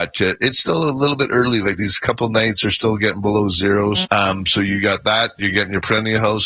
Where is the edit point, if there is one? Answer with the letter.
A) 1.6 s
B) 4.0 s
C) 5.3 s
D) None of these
B